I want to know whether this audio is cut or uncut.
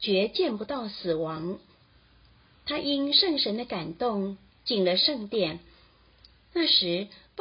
uncut